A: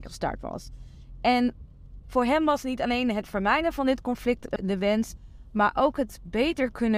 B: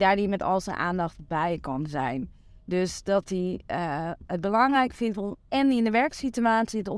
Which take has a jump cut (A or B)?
A